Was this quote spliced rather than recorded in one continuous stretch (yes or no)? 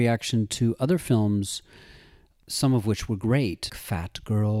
yes